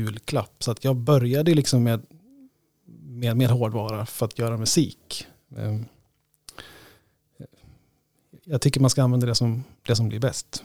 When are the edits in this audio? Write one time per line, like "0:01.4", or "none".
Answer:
0:05.5